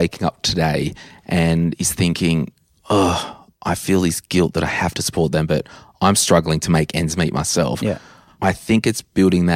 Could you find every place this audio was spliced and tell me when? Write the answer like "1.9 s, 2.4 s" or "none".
3.5 s